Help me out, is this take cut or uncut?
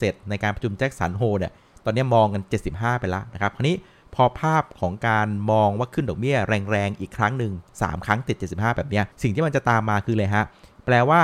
cut